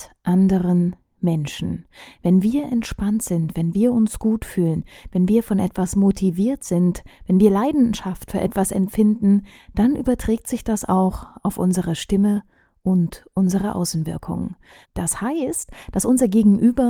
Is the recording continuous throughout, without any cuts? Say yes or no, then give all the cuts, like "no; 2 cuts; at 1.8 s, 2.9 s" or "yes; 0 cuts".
no; 1 cut; at 14.8 s